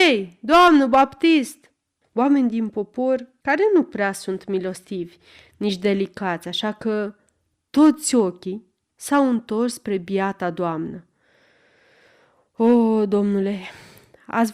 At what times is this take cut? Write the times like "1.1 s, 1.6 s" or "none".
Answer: 2.0 s